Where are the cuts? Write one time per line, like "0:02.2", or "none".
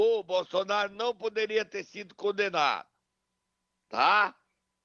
none